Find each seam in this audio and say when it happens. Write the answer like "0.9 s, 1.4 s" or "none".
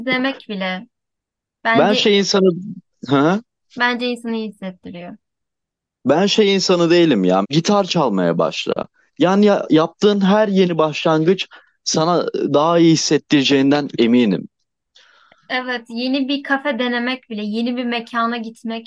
7.4 s